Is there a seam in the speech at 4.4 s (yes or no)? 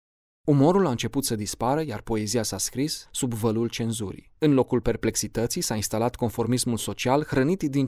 yes